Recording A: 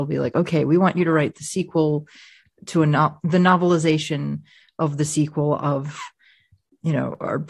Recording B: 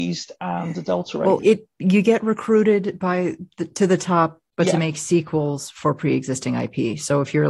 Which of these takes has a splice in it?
B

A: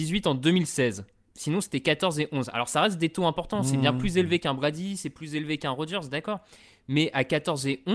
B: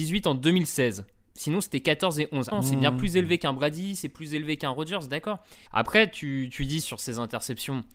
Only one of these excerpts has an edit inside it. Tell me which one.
B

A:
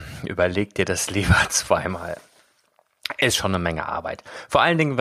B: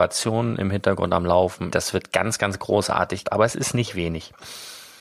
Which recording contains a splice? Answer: B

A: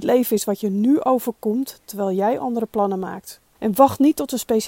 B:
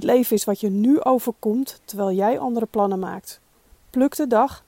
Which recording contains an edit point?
A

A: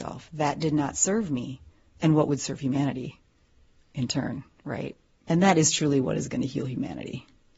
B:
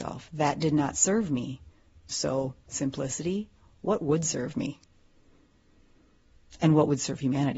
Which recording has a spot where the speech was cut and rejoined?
A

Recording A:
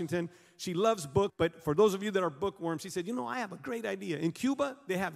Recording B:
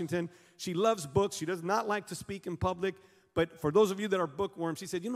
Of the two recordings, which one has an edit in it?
A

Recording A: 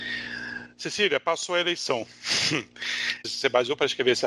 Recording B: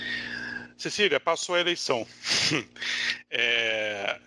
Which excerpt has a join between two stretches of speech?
A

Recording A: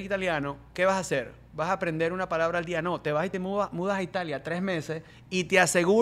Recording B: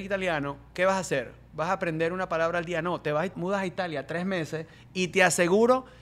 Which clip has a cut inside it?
B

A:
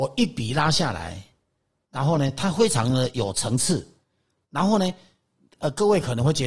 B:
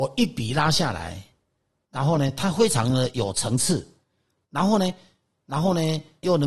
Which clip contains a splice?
B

